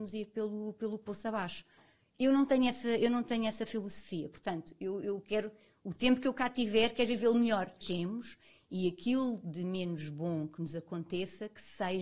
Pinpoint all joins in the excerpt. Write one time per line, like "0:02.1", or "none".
0:07.8